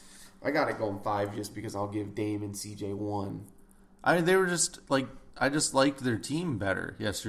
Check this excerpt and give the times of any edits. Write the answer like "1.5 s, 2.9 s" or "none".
none